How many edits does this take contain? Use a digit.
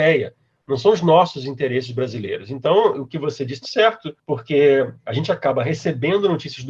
1